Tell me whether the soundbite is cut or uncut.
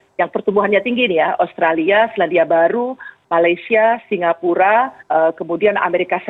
cut